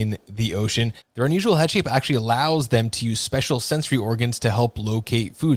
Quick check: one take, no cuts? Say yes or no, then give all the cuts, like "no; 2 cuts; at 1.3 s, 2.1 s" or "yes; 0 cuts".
no; 1 cut; at 1.0 s